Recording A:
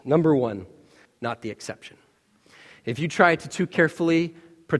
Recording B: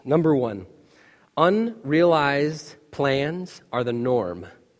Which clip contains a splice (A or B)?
A